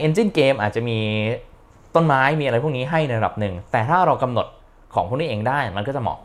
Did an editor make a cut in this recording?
no; 0 cuts

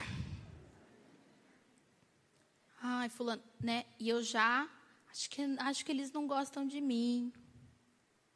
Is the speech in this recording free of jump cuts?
yes; 0 cuts

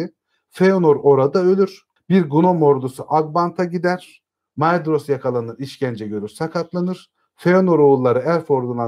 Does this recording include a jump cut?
yes; 1 cut; at 2.0 s

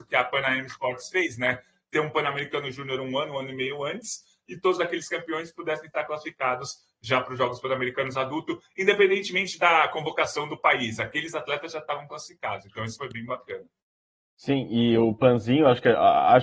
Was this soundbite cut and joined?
no; 0 cuts

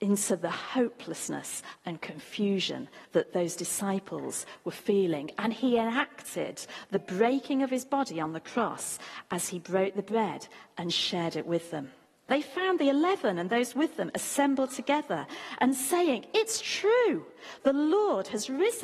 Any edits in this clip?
yes; 1 cut; at 12.3 s

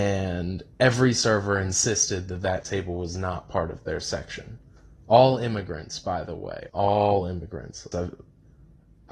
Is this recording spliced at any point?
yes; 2 cuts; at 6.7 s, 7.9 s

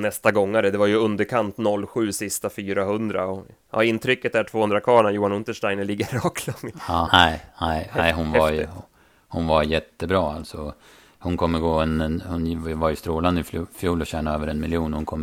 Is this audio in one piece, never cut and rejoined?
no; 1 cut; at 7.1 s

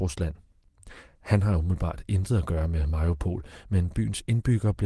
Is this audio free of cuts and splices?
yes; 0 cuts

